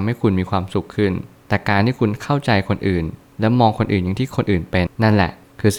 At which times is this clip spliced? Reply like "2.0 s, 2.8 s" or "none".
4.9 s

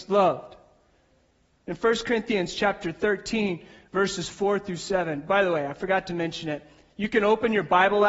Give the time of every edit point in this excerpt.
none

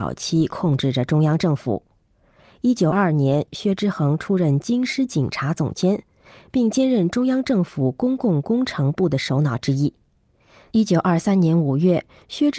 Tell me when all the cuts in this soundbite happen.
2.9 s, 10.7 s

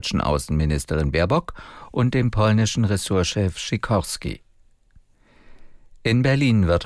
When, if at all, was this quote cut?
none

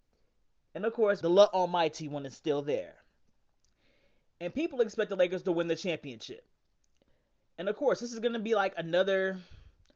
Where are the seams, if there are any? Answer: 1.2 s

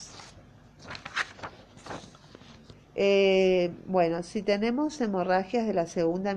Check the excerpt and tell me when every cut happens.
2.7 s

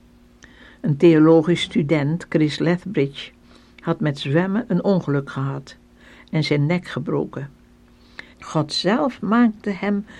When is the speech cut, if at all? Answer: 8.3 s

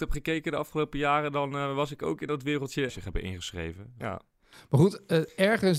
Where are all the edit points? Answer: 2.9 s, 4.0 s

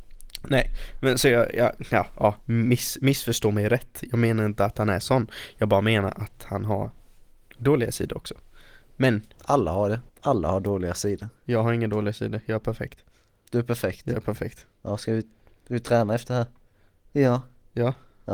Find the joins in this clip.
10.1 s, 17.0 s

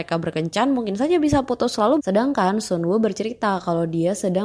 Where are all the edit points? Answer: 2.0 s

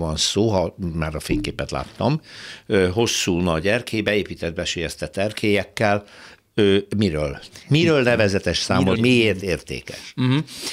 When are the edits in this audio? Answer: 7.6 s, 8.9 s

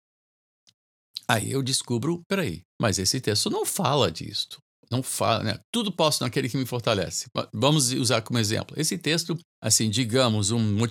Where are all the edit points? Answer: 2.7 s, 9.5 s

